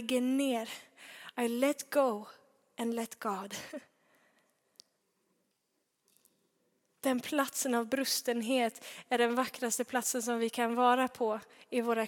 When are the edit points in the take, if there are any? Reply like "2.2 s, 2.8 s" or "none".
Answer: none